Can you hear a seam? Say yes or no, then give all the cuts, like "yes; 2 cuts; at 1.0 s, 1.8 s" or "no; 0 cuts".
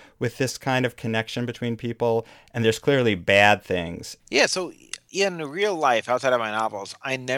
yes; 1 cut; at 4.2 s